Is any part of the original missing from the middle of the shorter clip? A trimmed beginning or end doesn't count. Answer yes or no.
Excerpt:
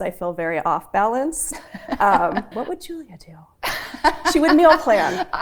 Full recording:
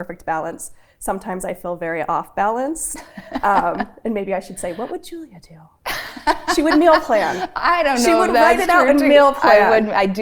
yes